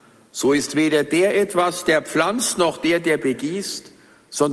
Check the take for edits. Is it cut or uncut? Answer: uncut